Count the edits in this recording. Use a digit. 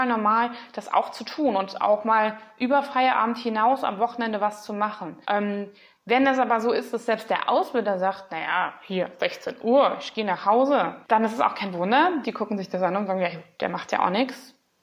3